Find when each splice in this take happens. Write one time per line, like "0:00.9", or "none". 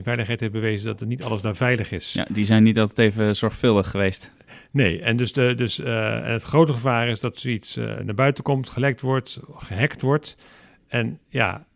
none